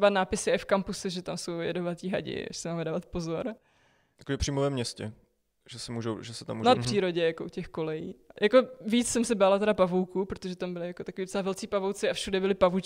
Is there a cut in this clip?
yes; 1 cut; at 6.7 s

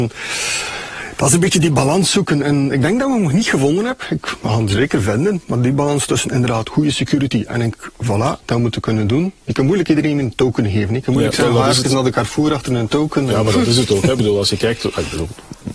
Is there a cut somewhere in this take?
yes; 1 cut; at 8.4 s

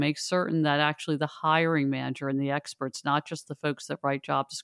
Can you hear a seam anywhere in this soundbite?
no; 0 cuts

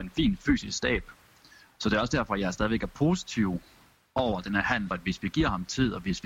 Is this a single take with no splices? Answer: no; 1 cut; at 4.9 s

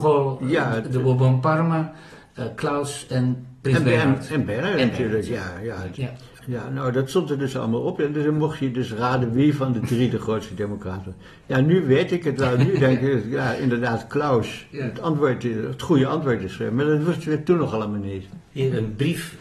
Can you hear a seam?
yes; 1 cut; at 5.9 s

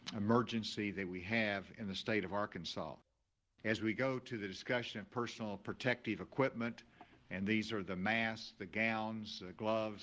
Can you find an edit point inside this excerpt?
no; 0 cuts

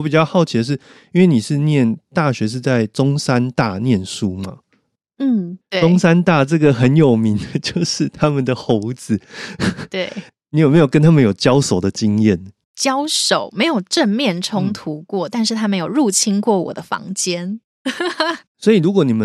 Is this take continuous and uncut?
yes; 0 cuts

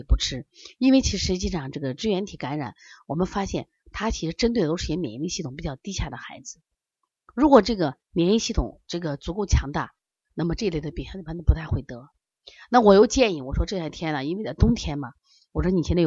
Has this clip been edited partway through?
no; 0 cuts

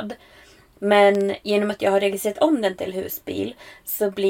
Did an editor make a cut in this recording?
no; 0 cuts

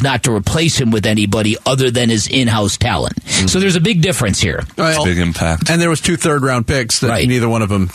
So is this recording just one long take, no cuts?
no; 1 cut; at 5.0 s

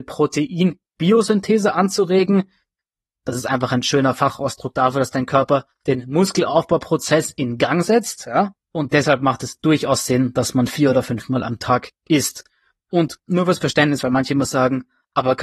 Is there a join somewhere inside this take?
yes; 1 cut; at 8.6 s

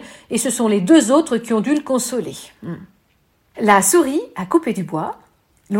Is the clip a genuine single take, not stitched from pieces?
no; 1 cut; at 3.5 s

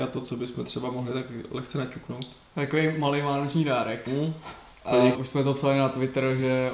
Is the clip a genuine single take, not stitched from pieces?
no; 1 cut; at 5.1 s

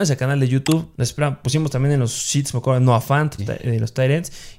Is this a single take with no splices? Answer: no; 2 cuts; at 0.9 s, 3.4 s

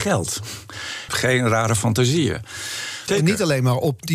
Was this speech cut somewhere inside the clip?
yes; 2 cuts; at 1.1 s, 3.1 s

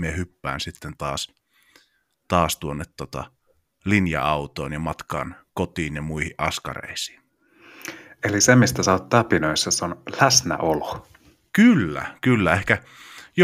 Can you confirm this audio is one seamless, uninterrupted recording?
yes; 0 cuts

